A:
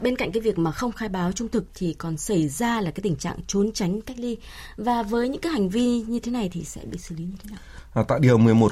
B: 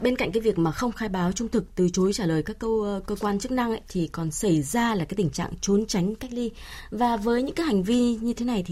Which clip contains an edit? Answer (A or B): A